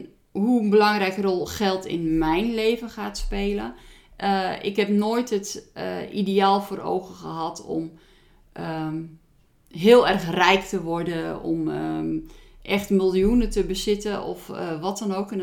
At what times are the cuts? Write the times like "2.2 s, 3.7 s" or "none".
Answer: none